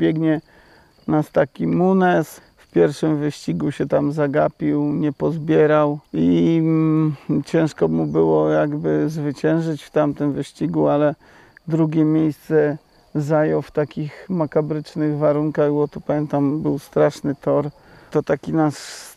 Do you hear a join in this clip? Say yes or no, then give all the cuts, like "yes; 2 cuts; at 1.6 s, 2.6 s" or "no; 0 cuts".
yes; 3 cuts; at 2.4 s, 6.1 s, 18.1 s